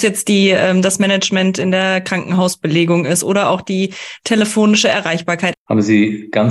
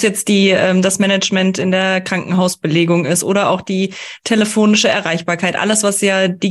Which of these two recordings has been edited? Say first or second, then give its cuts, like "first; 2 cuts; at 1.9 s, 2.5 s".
first; 1 cut; at 5.5 s